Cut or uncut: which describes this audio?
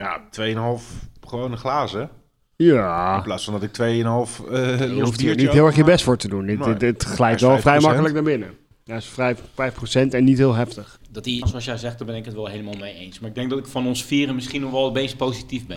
cut